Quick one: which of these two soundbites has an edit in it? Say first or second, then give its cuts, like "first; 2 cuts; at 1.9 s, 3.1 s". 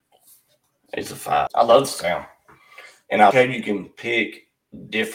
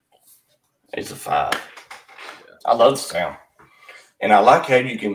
first; 2 cuts; at 1.5 s, 3.3 s